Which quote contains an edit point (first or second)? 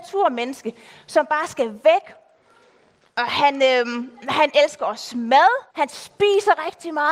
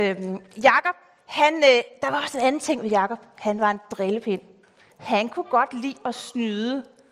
first